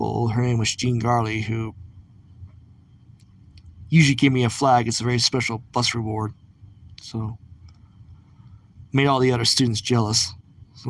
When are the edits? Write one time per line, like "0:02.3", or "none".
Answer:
none